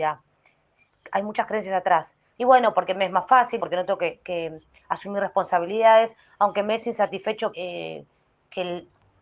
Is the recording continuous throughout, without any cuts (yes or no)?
no